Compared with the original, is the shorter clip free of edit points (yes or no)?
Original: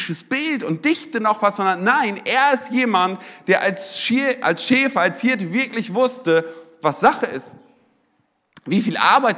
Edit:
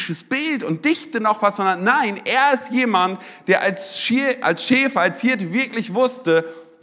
yes